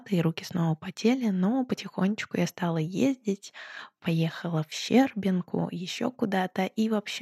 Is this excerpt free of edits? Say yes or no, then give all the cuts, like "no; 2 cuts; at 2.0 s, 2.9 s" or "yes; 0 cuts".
yes; 0 cuts